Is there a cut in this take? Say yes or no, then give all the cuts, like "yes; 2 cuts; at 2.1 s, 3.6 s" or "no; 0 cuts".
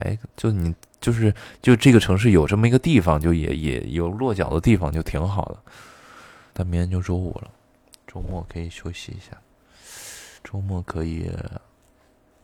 yes; 2 cuts; at 6.5 s, 10.4 s